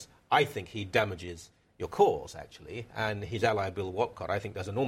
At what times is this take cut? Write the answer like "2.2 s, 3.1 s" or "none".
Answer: none

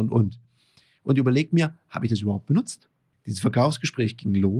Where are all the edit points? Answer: 3.1 s

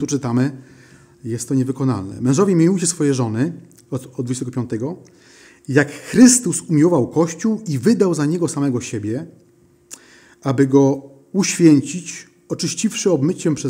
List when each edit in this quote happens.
none

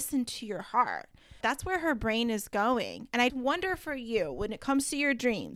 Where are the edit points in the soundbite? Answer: 1.4 s, 3.3 s

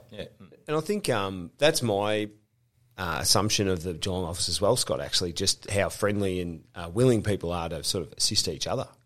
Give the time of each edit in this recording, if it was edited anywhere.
none

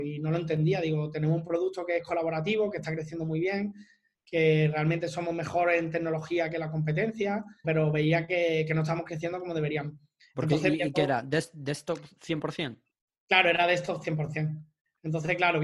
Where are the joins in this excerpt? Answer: 7.6 s

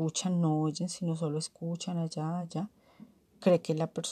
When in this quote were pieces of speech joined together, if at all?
2.4 s

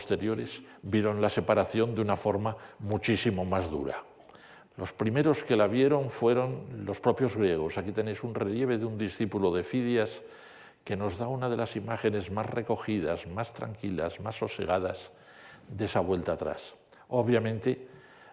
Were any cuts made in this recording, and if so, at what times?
4.7 s

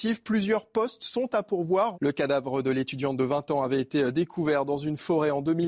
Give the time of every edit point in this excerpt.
1.9 s

